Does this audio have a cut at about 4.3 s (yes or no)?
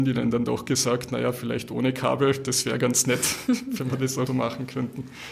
yes